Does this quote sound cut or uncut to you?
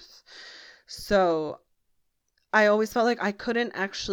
uncut